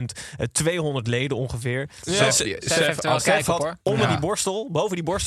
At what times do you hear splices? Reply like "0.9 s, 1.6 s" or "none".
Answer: 2.0 s